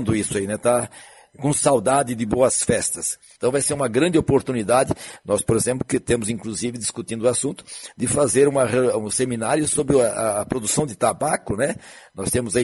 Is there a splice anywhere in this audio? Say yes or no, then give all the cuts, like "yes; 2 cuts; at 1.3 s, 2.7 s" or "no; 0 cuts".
no; 0 cuts